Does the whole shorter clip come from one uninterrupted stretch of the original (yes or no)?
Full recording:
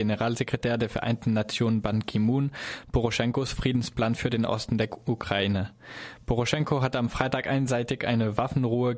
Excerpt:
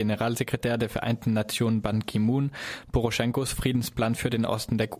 yes